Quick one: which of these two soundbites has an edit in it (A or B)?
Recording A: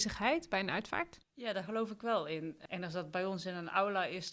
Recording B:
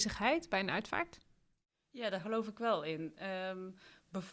A